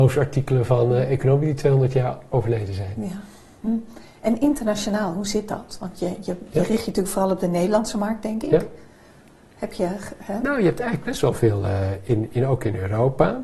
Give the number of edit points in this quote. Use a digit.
0